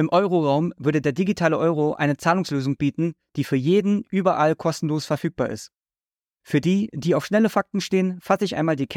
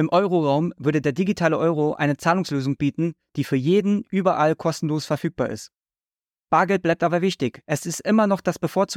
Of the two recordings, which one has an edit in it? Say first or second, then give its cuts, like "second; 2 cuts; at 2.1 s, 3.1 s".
first; 1 cut; at 6.4 s